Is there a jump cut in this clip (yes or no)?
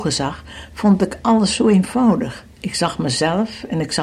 yes